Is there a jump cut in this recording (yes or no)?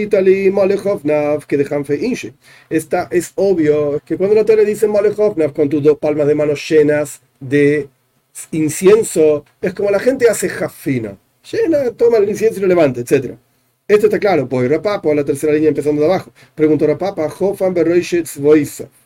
yes